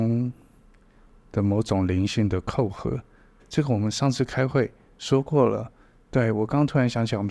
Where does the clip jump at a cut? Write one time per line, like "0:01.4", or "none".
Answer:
0:03.4